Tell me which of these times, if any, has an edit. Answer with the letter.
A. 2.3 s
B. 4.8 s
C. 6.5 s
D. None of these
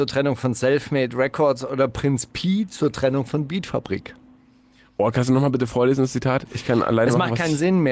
D